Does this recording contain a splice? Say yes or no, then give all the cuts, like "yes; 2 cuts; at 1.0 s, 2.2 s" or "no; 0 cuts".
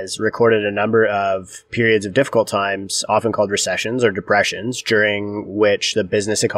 no; 0 cuts